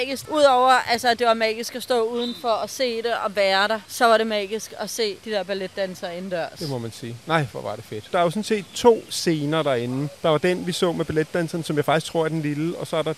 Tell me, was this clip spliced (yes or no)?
no